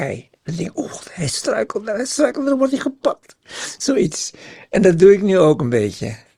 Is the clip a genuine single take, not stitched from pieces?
yes; 0 cuts

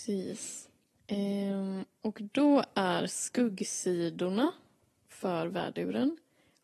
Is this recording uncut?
yes; 0 cuts

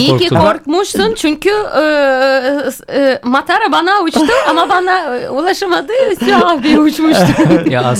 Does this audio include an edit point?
no; 0 cuts

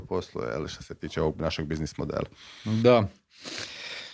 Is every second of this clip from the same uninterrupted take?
yes; 0 cuts

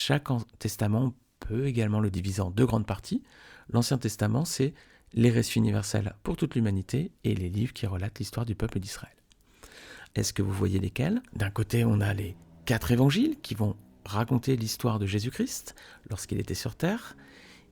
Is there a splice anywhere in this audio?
yes; 2 cuts; at 10.1 s, 11.3 s

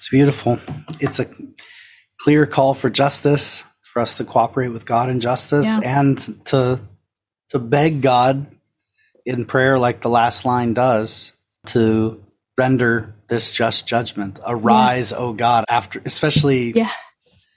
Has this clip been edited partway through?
yes; 1 cut; at 15.6 s

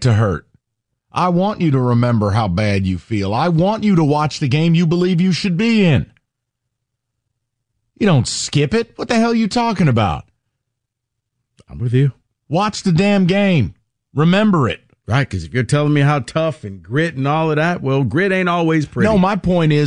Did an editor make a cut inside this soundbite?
no; 0 cuts

